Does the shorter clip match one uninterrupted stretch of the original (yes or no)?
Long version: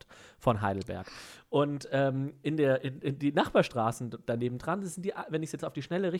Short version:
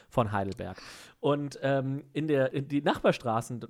no